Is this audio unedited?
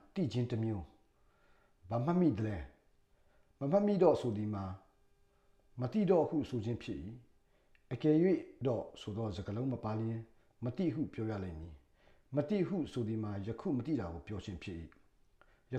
yes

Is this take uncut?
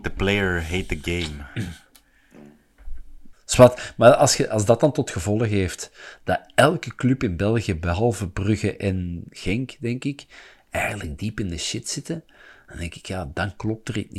no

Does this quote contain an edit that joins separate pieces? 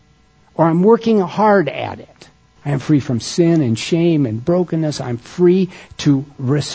yes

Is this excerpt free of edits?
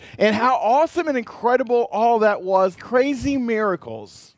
no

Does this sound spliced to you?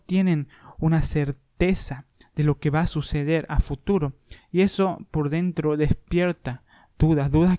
no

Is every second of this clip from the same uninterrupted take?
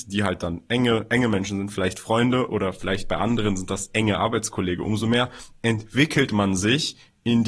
yes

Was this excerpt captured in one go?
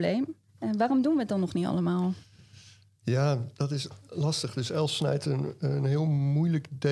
yes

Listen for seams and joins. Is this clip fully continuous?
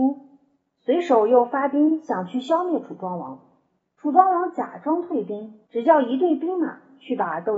no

